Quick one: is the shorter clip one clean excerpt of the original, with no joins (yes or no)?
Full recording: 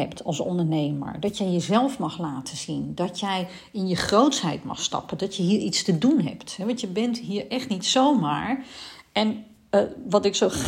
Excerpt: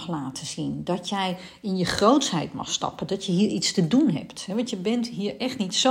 yes